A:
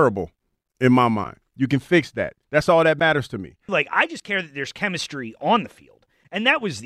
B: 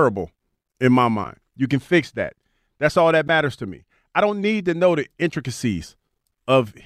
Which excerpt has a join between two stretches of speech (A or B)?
A